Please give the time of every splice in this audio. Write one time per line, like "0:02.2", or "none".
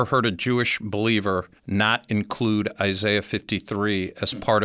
0:01.6